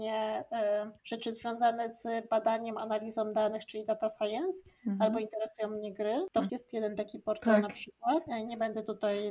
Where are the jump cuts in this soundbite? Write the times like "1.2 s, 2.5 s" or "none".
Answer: 1.0 s, 6.5 s